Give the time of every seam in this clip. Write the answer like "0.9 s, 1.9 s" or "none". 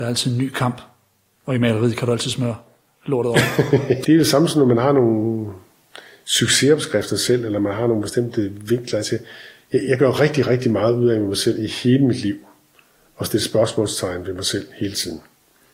4.0 s